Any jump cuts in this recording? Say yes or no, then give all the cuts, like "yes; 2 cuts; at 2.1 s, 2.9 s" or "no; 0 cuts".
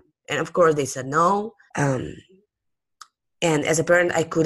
yes; 1 cut; at 1.7 s